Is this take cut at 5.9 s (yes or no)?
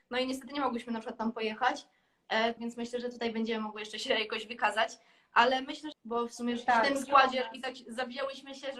yes